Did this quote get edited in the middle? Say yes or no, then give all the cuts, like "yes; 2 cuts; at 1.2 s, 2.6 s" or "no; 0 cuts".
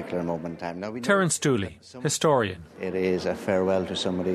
no; 0 cuts